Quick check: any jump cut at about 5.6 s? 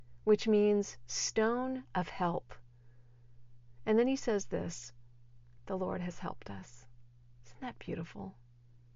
yes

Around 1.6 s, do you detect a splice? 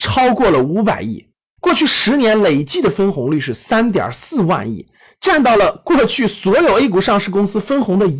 yes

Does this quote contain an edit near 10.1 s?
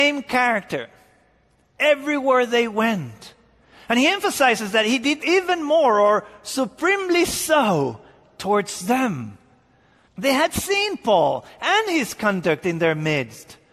yes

